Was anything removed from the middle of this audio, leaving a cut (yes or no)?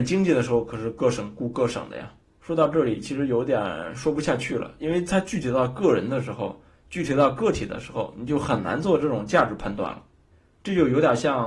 yes